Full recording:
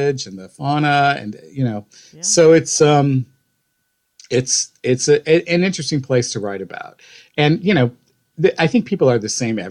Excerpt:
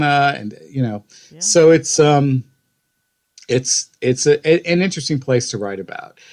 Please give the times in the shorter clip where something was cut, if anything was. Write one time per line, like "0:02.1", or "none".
none